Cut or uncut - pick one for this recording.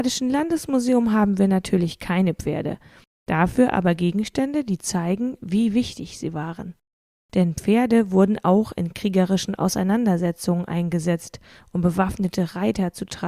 uncut